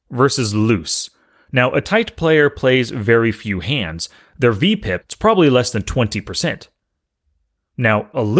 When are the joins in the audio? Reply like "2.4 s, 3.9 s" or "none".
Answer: 5.0 s